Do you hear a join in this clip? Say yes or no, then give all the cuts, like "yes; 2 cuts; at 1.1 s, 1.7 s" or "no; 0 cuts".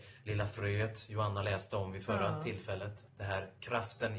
yes; 1 cut; at 3.1 s